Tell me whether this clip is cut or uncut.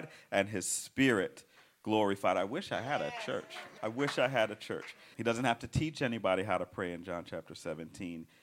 cut